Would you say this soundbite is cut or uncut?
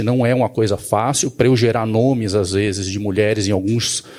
uncut